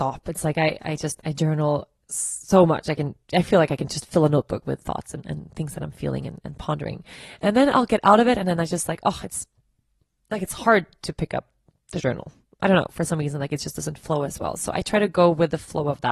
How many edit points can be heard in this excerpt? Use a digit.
0